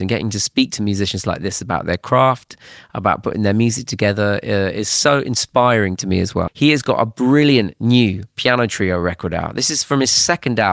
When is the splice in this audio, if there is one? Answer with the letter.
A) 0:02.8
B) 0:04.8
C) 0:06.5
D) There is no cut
C